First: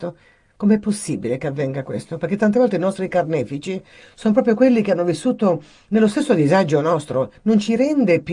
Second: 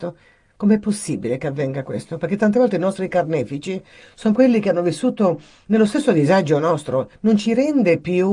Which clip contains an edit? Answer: second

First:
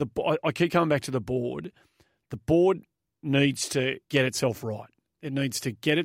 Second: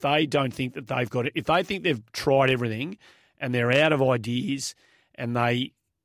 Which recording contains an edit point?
first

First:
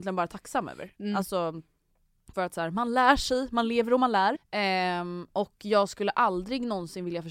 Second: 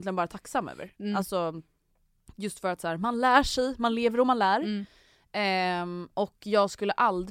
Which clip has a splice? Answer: first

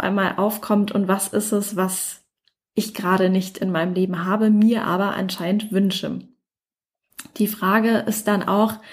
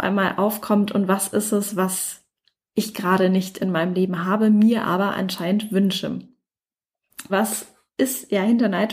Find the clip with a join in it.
second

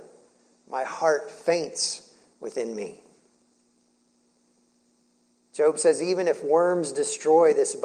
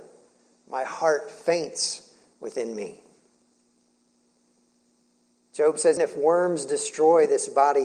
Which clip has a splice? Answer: second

